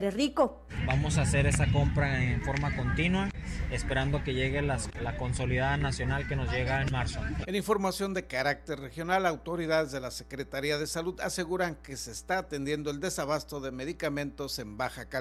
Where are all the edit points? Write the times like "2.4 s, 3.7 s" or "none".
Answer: 5.0 s, 7.4 s